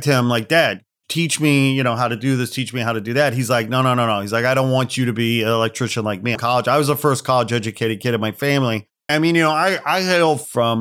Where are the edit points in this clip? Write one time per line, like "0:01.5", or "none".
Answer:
0:06.3
0:09.1